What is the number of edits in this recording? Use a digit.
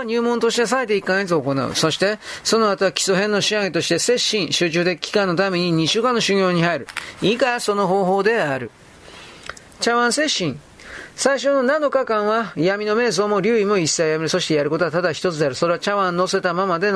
0